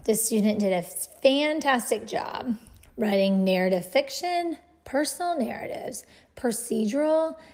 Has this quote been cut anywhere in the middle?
no; 0 cuts

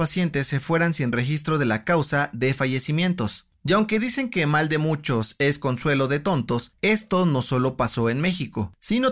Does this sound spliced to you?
no; 0 cuts

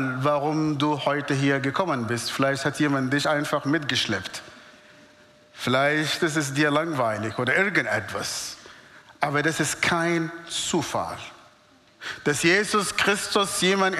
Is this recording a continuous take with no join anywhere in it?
yes; 0 cuts

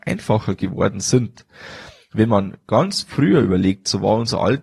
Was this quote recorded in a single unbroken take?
yes; 0 cuts

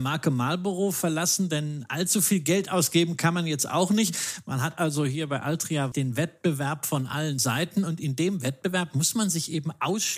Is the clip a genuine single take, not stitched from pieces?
no; 2 cuts; at 4.4 s, 5.9 s

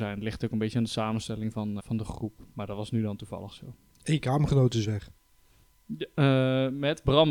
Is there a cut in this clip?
yes; 1 cut; at 1.8 s

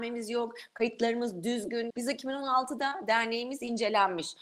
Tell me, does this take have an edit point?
yes; 1 cut; at 1.9 s

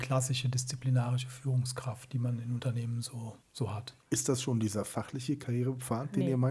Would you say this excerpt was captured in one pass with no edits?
no; 1 cut; at 4.0 s

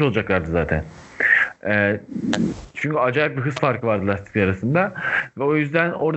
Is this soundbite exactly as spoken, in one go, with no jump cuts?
yes; 0 cuts

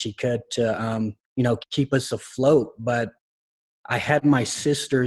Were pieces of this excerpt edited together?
yes; 1 cut; at 1.2 s

